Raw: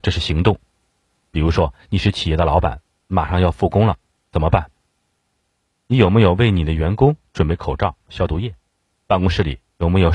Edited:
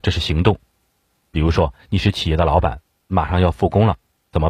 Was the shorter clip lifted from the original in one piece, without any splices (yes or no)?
yes